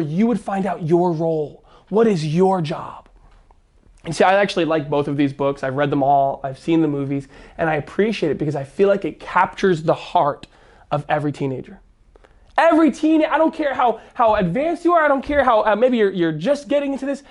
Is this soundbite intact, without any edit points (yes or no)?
yes